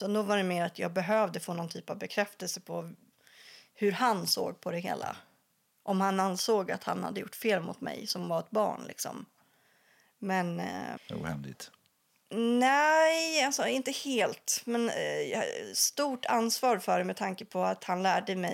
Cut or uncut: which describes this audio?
cut